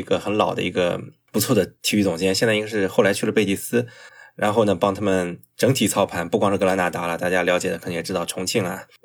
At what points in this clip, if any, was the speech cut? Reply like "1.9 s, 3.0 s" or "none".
none